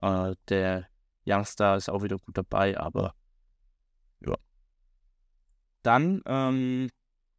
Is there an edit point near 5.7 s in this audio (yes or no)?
no